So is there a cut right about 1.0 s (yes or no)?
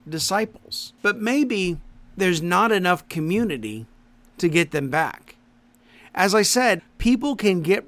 no